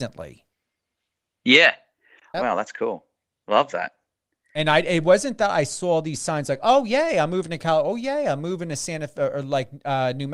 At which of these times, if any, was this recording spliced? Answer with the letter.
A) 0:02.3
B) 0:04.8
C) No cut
A